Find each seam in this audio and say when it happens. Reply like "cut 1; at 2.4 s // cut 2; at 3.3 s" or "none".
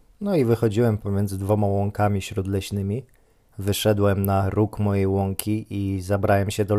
cut 1; at 3.5 s